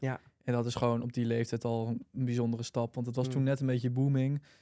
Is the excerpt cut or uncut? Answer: uncut